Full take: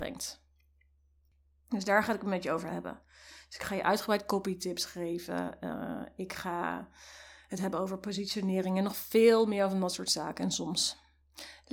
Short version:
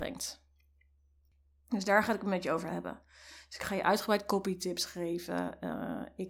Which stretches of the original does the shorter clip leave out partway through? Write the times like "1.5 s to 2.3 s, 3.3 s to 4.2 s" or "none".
none